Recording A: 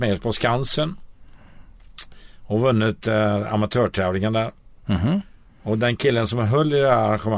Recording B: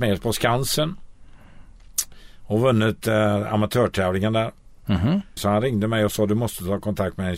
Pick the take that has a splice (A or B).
B